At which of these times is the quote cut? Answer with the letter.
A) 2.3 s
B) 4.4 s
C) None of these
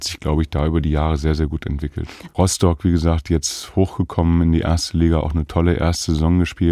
A